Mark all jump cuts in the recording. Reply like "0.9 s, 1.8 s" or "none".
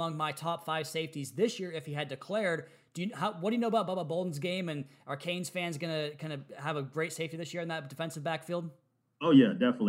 none